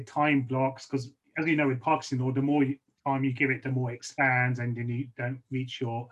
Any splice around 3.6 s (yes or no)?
no